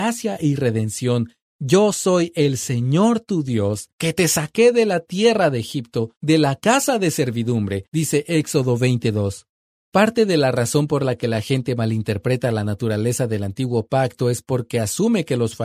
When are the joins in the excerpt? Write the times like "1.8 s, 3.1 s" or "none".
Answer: none